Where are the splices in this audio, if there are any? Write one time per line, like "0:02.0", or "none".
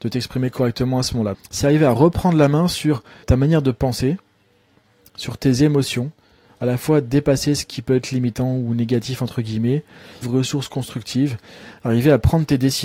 0:01.3
0:03.2
0:10.2

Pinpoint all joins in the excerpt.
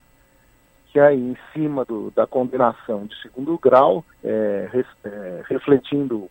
0:01.8
0:04.1

